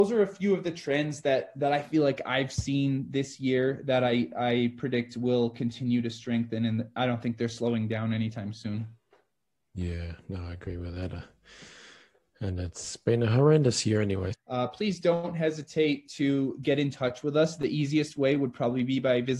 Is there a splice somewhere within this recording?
yes; 1 cut; at 14.3 s

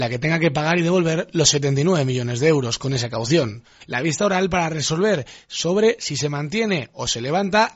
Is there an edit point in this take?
yes; 1 cut; at 3.8 s

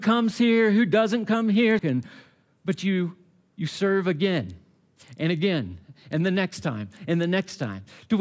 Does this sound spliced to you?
yes; 1 cut; at 1.8 s

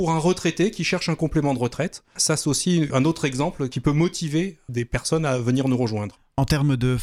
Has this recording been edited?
no; 0 cuts

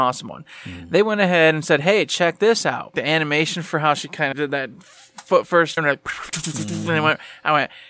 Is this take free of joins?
no; 3 cuts; at 2.9 s, 4.3 s, 5.8 s

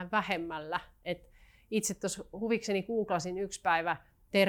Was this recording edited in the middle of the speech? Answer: no; 0 cuts

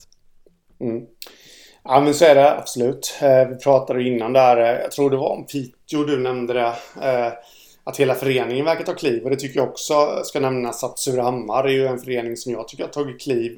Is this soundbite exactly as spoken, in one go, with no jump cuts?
yes; 0 cuts

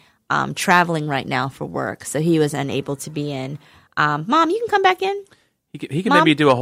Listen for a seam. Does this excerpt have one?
no; 0 cuts

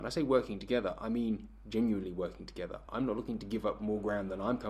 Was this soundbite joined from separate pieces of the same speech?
no; 0 cuts

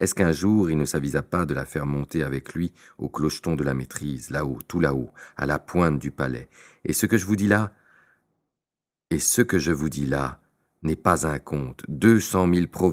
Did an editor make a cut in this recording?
no; 0 cuts

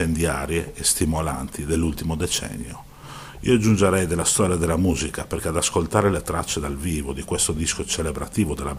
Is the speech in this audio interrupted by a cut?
no; 0 cuts

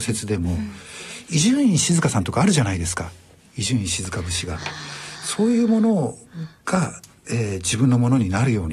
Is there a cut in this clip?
no; 0 cuts

